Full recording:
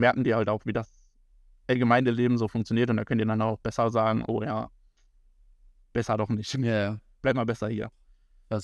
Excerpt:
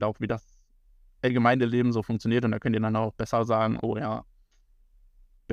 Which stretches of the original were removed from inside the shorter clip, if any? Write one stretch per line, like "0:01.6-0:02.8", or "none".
none